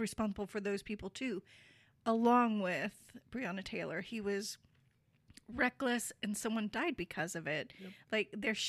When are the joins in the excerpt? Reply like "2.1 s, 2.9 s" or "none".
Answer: none